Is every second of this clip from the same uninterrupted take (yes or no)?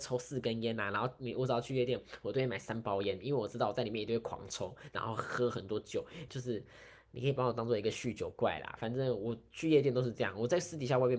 no